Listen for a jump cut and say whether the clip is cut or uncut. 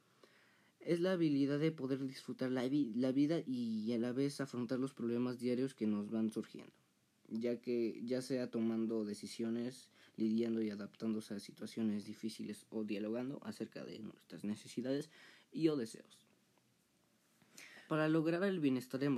cut